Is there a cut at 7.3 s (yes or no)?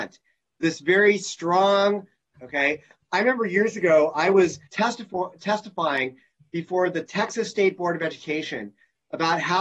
no